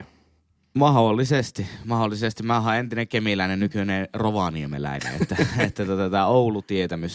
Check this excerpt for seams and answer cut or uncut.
uncut